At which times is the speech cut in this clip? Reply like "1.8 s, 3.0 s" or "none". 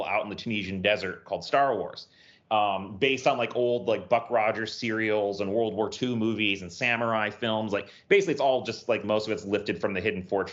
9.0 s